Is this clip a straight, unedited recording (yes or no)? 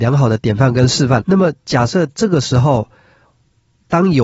no